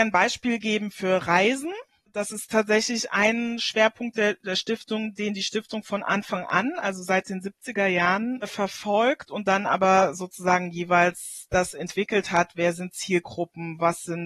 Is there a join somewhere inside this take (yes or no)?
no